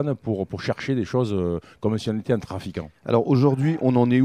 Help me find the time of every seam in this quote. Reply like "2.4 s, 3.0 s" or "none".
none